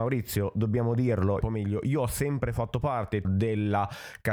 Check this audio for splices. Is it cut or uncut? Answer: cut